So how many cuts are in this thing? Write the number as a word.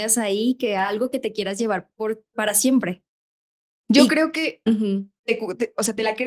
one